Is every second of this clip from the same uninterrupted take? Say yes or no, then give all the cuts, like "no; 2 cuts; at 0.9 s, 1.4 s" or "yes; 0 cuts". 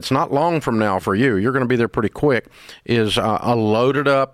yes; 0 cuts